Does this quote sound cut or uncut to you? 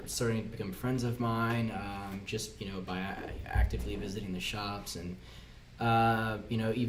uncut